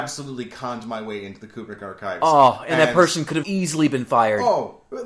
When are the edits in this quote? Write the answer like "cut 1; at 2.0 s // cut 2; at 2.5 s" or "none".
cut 1; at 3.4 s